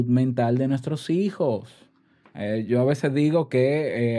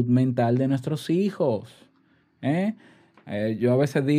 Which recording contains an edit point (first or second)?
first